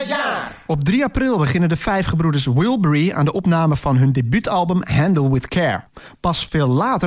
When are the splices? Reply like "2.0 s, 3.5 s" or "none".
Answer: none